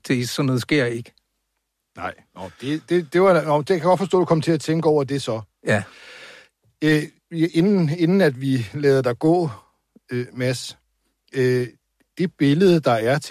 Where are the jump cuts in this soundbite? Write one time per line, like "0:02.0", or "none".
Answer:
none